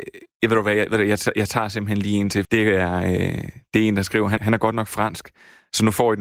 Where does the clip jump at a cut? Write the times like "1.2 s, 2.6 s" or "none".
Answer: 2.4 s, 4.4 s